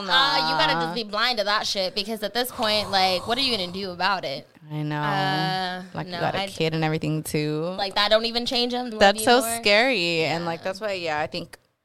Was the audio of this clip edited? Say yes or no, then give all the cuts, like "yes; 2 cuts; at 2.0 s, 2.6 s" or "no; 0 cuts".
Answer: yes; 1 cut; at 8.9 s